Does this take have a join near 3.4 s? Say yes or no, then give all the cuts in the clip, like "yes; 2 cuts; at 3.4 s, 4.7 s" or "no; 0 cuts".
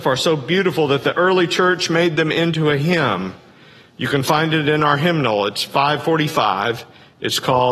no; 0 cuts